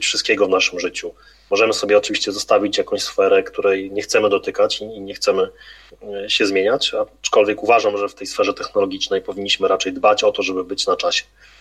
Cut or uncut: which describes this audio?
uncut